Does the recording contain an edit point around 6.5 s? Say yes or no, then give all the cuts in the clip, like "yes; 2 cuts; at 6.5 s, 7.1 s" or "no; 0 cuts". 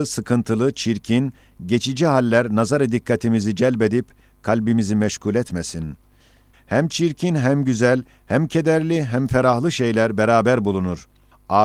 yes; 1 cut; at 6.5 s